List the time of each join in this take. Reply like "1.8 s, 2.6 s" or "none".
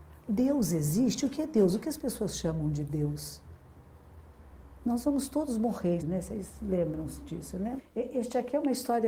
6.0 s, 7.8 s